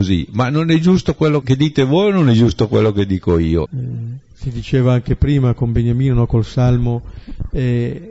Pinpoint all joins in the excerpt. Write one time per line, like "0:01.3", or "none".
0:01.4
0:03.7